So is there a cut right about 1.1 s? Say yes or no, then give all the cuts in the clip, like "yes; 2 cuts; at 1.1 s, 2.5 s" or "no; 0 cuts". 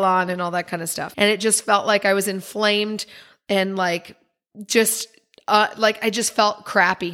yes; 1 cut; at 1.1 s